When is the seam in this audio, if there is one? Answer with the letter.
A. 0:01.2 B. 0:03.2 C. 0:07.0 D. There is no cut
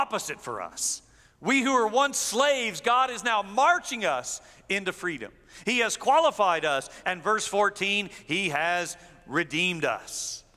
C